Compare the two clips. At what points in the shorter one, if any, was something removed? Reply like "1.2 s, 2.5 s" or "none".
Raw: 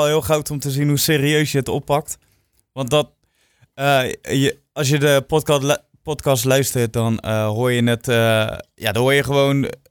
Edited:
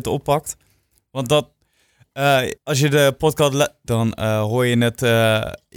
2.6 s, 3.9 s